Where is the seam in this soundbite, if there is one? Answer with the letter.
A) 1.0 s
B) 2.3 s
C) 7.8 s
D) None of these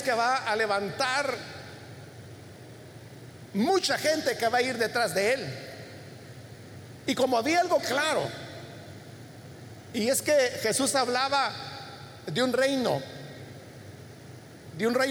C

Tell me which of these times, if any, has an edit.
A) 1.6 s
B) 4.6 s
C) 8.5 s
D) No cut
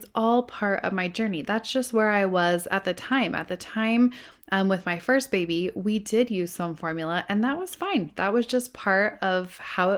D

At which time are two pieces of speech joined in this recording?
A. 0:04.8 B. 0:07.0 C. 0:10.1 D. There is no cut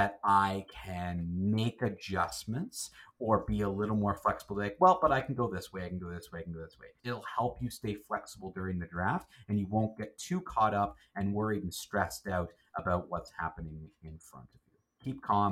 B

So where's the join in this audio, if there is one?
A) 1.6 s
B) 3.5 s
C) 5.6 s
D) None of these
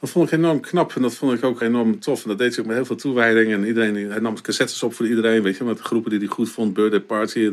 A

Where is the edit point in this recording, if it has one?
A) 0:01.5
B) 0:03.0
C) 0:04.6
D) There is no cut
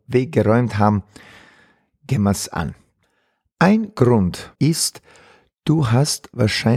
C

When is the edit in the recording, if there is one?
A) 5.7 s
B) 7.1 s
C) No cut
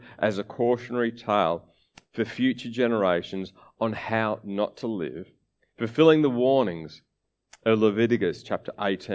C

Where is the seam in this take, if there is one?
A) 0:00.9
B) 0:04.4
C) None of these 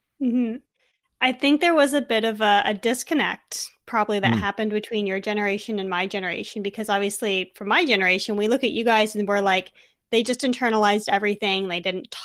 C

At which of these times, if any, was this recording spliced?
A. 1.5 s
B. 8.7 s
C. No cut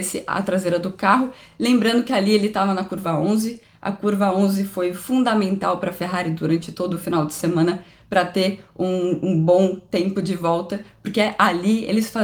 C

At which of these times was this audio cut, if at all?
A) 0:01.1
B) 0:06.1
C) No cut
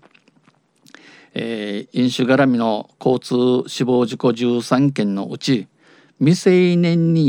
C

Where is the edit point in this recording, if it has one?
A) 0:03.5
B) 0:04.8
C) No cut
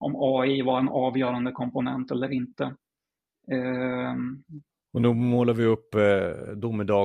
B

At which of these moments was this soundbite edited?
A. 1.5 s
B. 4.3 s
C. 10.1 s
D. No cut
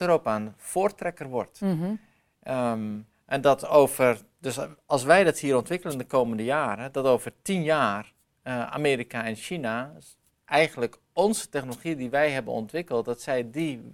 D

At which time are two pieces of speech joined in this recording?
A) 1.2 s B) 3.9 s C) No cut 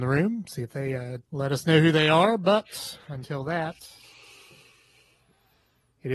A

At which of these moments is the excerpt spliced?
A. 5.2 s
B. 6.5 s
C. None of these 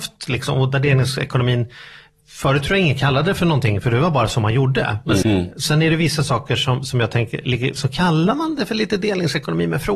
A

